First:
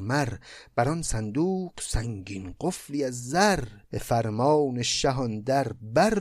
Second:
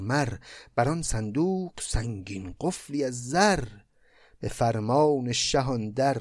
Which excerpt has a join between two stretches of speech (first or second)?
first